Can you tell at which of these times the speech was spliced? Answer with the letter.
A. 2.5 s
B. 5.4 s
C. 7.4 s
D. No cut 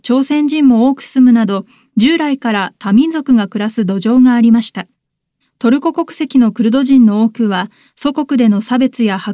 B